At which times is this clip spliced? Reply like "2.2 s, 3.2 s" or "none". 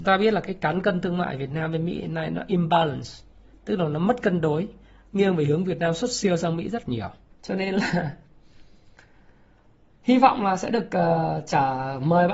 7.3 s